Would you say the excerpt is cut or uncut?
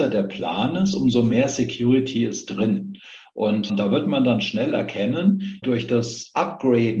cut